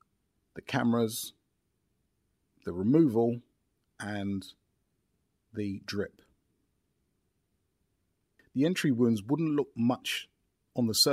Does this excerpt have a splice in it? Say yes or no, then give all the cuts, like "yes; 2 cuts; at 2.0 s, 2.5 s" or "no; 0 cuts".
no; 0 cuts